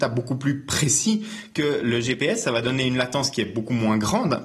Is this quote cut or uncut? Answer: uncut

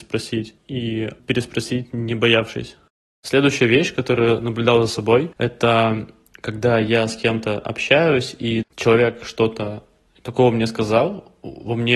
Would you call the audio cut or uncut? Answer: cut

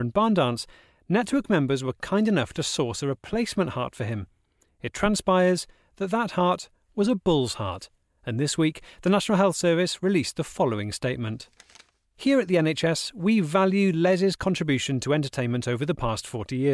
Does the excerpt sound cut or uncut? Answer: uncut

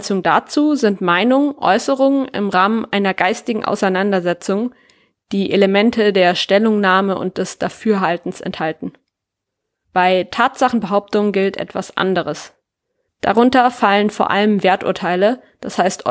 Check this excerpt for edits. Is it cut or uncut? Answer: cut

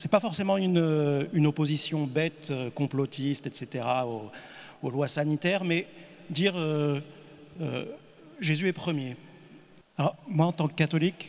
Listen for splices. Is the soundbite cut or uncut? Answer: cut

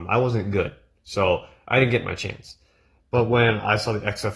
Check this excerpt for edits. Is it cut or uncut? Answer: uncut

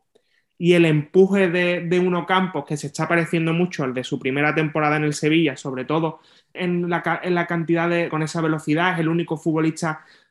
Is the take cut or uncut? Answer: cut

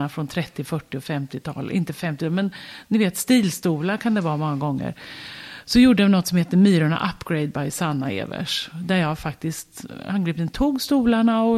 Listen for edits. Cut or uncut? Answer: uncut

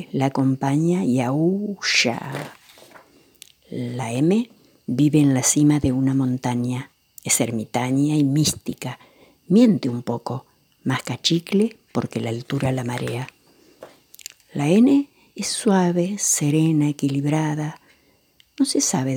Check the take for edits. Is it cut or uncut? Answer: uncut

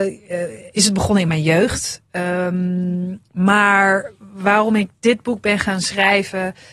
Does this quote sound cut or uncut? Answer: uncut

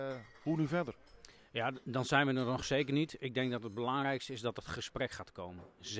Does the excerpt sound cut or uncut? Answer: uncut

